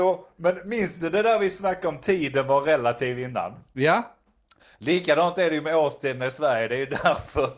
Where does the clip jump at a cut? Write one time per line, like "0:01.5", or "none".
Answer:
none